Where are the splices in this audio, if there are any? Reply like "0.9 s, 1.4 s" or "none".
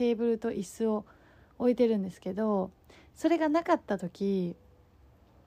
none